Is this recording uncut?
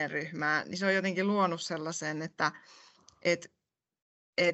yes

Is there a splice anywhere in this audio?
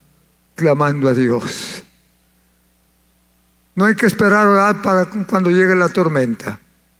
no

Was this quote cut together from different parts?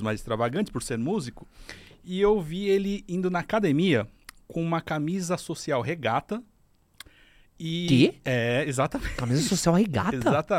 no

